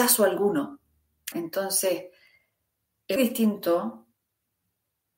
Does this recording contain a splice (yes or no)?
yes